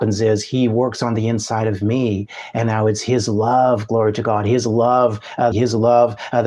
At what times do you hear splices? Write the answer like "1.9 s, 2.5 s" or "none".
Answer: 5.5 s